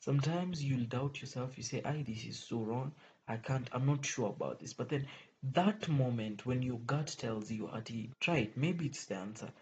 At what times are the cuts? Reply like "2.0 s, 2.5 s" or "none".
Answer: 8.1 s